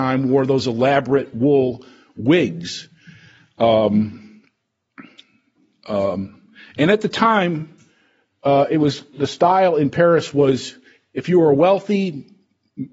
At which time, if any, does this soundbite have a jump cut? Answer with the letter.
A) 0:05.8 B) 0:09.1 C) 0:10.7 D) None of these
B